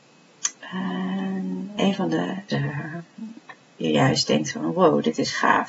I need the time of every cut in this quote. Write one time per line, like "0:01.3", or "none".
0:02.5
0:03.8